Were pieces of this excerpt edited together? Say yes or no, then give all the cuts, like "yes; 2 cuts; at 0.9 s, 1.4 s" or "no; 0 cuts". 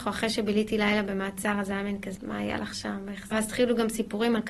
yes; 2 cuts; at 2.2 s, 3.3 s